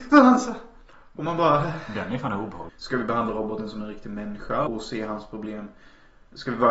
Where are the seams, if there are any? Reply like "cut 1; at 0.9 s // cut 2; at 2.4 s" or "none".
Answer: cut 1; at 2.7 s // cut 2; at 4.7 s